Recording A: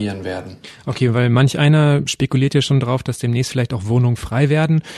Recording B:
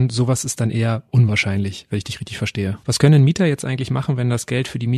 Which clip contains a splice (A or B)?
B